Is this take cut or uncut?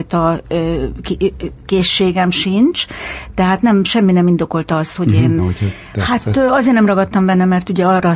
cut